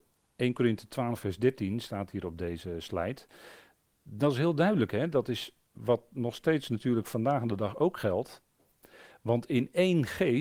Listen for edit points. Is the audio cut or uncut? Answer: uncut